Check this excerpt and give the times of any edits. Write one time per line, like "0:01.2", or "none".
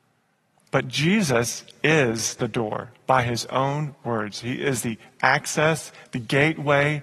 0:06.0